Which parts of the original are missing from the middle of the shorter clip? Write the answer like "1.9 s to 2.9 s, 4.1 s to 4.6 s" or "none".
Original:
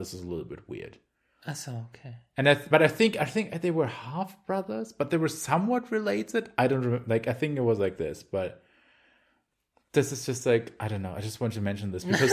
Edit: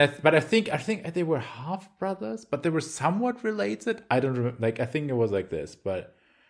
none